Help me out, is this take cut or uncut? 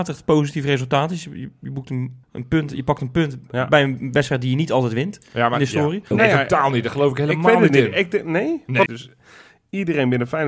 cut